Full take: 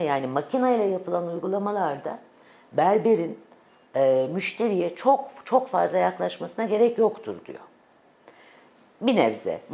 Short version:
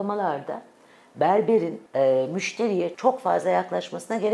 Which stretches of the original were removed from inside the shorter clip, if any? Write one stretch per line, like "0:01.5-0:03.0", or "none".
0:03.4-0:03.9
0:04.9-0:05.4